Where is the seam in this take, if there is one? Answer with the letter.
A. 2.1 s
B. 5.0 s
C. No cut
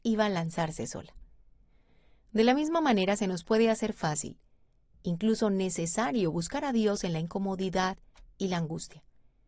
C